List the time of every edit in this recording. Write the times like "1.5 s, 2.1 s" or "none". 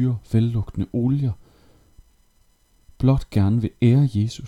none

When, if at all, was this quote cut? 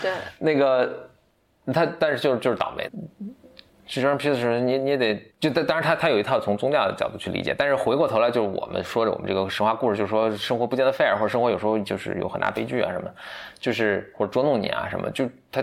2.8 s, 5.3 s

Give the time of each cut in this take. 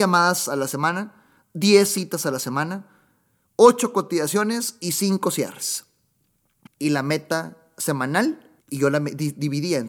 6.7 s, 8.6 s

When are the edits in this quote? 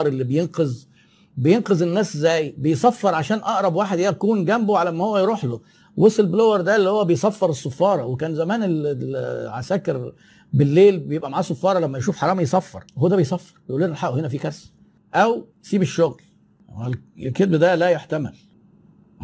12.9 s, 15.5 s

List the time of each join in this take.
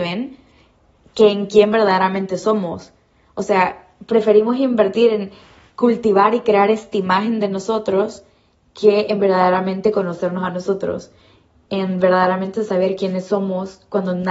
none

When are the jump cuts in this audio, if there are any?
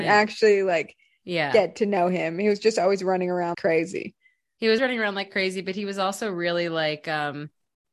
3.5 s, 4.8 s

